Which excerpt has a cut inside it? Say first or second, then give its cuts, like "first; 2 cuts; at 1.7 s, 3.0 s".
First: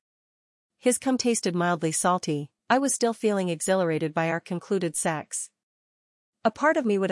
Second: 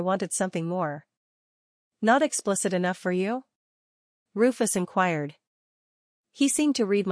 first; 1 cut; at 2.6 s